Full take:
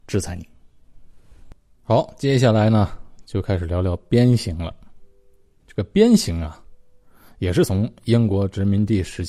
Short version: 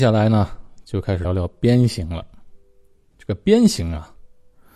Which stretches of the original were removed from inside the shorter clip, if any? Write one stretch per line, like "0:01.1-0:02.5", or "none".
0:03.7-0:03.7